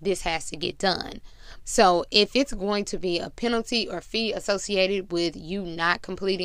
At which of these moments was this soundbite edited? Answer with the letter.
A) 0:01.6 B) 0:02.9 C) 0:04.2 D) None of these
A